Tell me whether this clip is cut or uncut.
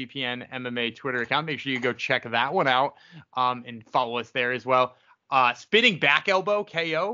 uncut